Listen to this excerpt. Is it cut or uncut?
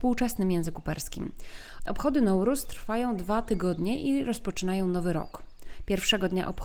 cut